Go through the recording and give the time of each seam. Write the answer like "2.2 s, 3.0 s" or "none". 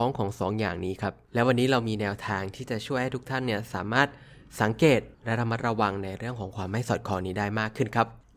5.1 s